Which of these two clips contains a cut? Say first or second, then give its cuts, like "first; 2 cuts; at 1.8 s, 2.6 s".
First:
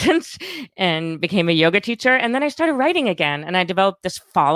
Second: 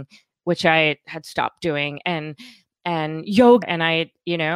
second; 1 cut; at 3.6 s